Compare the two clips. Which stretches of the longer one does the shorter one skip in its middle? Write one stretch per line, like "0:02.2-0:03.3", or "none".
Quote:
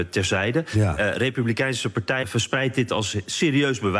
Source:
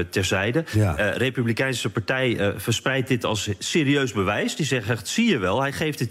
0:02.2-0:02.5